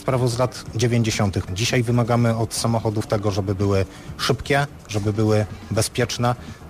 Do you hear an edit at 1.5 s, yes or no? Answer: yes